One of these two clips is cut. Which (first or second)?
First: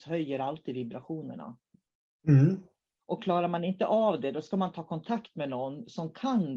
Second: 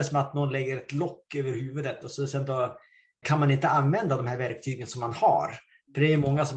second